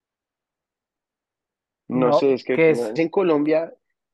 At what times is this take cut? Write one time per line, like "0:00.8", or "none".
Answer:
0:03.0